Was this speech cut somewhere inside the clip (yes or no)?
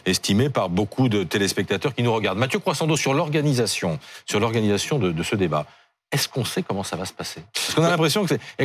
no